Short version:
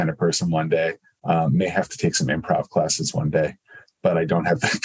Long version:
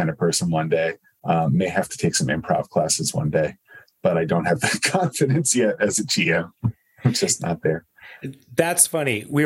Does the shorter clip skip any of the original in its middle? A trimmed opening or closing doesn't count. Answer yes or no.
no